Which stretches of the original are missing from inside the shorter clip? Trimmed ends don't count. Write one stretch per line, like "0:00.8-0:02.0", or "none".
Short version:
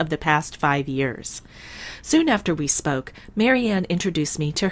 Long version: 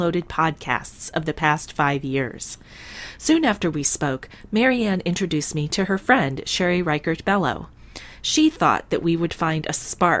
none